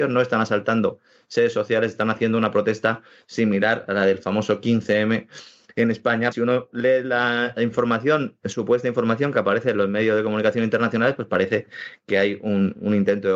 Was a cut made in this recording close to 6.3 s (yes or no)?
yes